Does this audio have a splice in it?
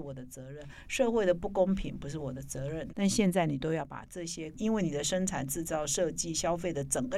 yes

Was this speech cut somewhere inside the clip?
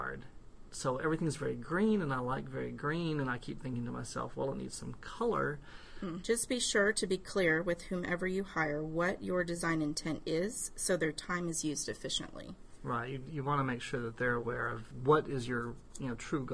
yes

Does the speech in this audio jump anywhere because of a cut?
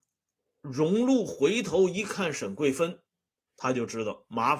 yes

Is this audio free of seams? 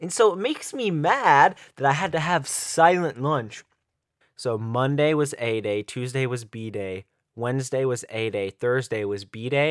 no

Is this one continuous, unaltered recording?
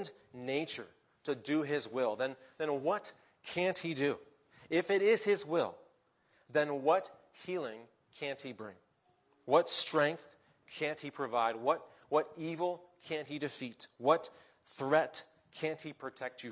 yes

